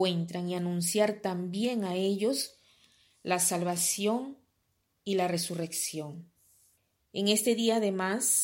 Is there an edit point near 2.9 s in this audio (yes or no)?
no